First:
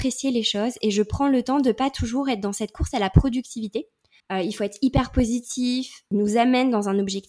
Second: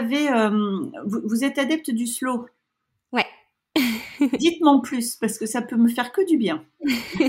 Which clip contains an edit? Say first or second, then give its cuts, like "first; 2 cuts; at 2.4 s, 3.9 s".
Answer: first; 2 cuts; at 4.2 s, 6.1 s